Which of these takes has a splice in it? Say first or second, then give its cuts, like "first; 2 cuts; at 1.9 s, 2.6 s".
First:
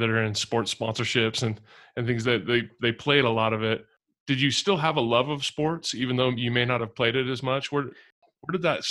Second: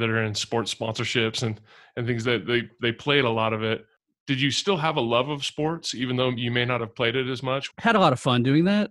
second; 1 cut; at 7.7 s